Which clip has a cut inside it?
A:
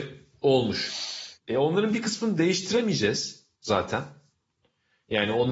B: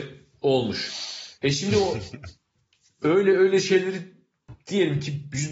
A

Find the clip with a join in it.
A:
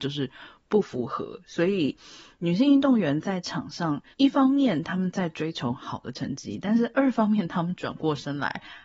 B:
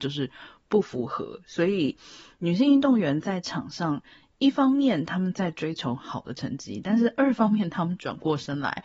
A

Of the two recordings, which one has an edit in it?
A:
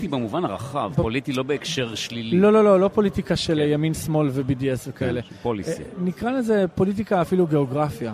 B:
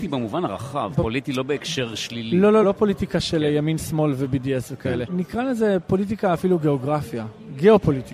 B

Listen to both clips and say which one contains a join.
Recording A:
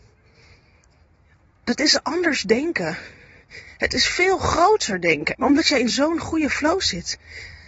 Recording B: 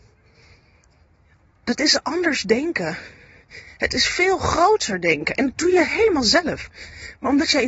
A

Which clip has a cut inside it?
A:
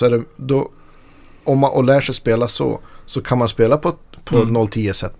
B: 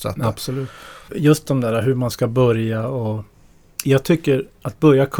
B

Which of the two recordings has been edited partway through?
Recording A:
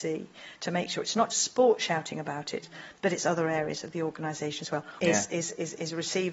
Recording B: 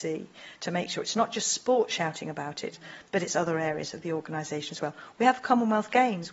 A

